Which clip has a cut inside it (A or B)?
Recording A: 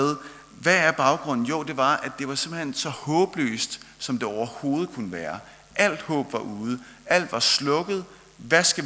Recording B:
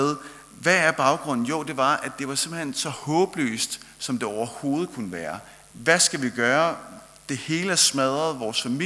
B